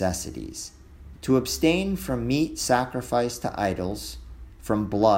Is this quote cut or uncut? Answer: cut